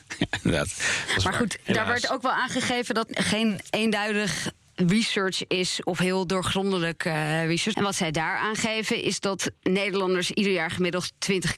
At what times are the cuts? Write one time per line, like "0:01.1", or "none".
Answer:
0:03.1
0:07.7